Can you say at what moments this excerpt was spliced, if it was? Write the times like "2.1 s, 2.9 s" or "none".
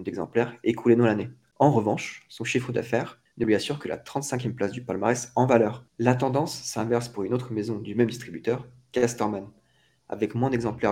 none